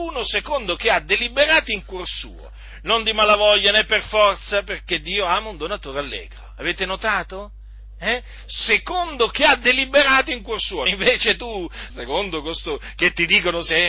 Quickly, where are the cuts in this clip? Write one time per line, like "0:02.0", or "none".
0:10.9
0:11.9